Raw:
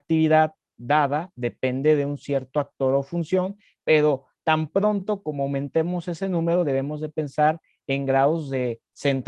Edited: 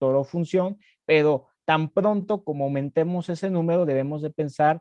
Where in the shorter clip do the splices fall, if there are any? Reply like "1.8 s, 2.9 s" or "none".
none